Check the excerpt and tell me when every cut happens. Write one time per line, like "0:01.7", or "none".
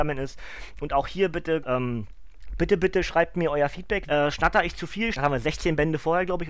0:01.6
0:04.1
0:05.1